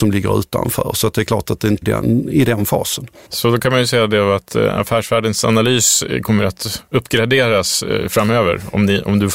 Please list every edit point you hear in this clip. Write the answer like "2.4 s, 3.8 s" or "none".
1.8 s, 3.2 s